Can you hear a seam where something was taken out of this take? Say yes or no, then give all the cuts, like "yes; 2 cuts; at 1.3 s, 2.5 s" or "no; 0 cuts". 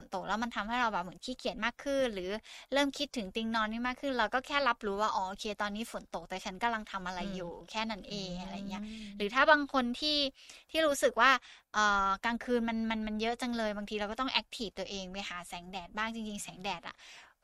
yes; 1 cut; at 11.6 s